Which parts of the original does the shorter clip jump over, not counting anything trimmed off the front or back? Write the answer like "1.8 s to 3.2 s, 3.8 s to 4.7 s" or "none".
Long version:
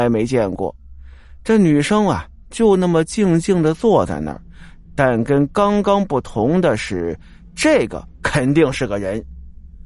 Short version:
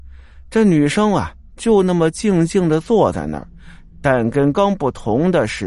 5.5 s to 5.8 s